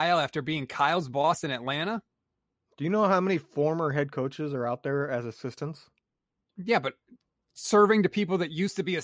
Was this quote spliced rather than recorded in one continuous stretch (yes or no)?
no